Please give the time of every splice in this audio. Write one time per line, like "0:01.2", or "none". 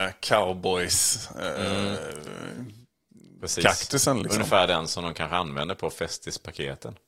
none